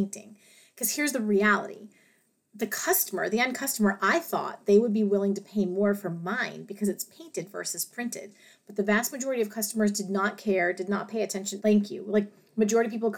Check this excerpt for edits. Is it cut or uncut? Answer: cut